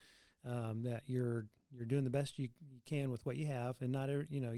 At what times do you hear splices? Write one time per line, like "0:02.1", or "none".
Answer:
none